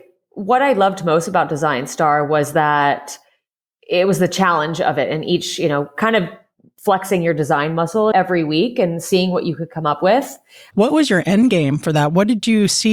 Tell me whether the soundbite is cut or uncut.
cut